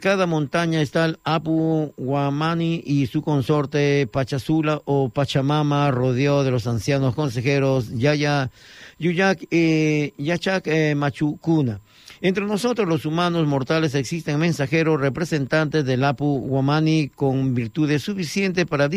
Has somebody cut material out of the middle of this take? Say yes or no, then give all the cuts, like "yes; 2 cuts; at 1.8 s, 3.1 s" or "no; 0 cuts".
no; 0 cuts